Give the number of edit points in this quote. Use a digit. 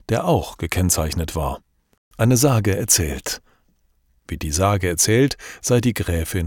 2